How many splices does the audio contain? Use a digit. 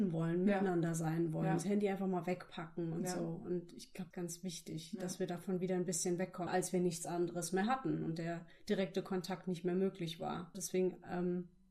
3